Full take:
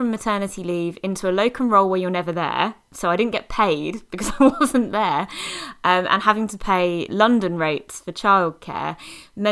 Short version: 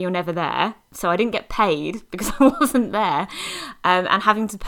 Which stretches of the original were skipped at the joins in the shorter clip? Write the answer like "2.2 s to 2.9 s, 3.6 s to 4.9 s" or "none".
none